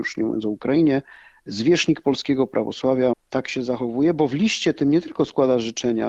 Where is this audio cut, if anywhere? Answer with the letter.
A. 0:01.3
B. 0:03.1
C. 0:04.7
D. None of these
B